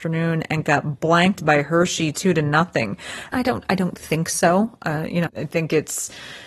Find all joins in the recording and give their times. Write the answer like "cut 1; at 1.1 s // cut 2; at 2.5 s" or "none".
cut 1; at 3.3 s // cut 2; at 5.3 s